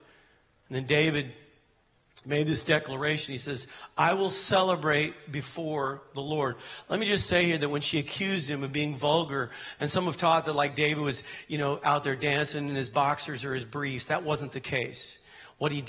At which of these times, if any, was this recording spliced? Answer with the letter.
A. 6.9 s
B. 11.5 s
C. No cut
C